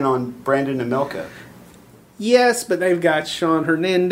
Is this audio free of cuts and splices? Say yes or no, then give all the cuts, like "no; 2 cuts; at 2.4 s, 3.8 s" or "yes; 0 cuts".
yes; 0 cuts